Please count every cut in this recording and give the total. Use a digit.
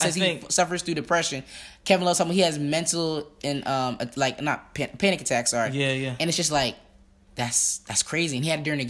0